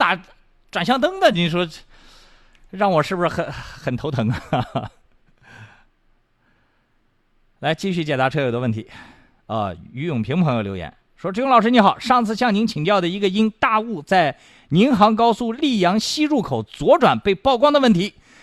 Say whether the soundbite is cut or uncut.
uncut